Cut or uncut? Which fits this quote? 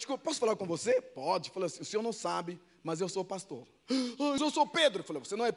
cut